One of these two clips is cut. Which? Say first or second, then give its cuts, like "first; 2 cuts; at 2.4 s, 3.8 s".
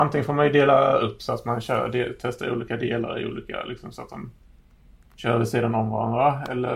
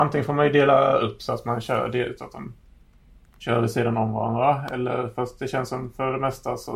second; 1 cut; at 2.2 s